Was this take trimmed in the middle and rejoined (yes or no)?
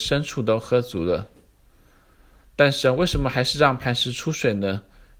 no